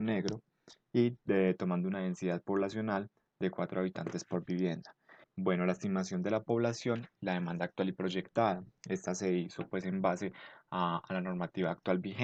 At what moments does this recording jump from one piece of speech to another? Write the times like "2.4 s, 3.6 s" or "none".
5.2 s